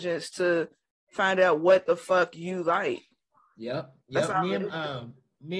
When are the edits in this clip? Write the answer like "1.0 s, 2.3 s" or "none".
4.0 s